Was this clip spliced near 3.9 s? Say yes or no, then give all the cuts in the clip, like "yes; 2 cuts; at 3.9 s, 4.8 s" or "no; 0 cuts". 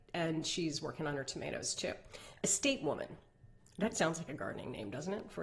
yes; 2 cuts; at 2.4 s, 3.9 s